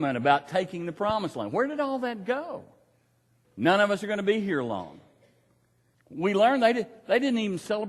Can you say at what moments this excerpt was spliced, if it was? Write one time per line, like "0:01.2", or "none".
0:03.4
0:05.9